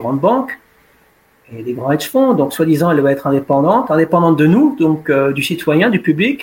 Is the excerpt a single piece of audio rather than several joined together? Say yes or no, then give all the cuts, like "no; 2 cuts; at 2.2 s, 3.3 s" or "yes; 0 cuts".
yes; 0 cuts